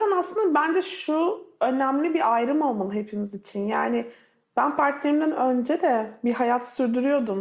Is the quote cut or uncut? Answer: uncut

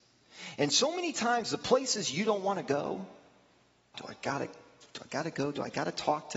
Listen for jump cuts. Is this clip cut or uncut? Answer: cut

